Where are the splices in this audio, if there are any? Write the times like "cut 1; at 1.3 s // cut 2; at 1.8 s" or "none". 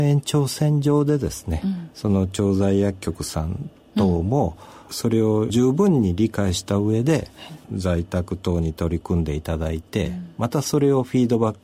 cut 1; at 7.6 s